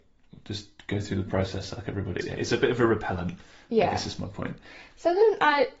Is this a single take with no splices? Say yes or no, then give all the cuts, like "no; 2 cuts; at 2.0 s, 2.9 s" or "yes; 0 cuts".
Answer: no; 1 cut; at 2.2 s